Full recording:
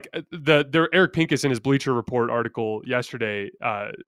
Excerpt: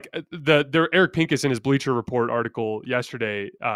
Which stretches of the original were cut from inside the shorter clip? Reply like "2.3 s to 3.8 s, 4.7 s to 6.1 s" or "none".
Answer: none